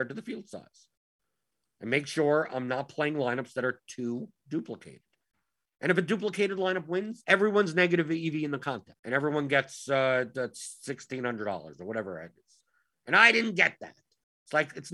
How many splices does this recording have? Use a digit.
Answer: 2